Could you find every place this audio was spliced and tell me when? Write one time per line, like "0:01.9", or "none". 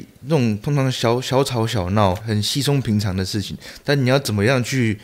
0:02.2